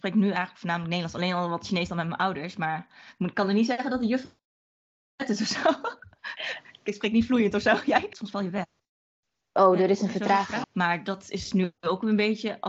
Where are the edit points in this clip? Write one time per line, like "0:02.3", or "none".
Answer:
0:08.1
0:10.6